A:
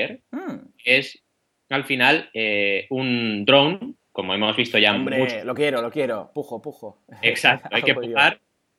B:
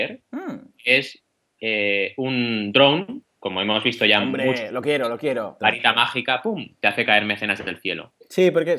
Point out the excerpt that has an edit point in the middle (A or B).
B